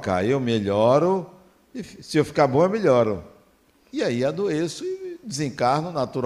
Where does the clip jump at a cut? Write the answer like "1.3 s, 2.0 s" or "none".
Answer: 3.9 s